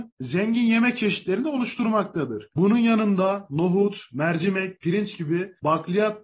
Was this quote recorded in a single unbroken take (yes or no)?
no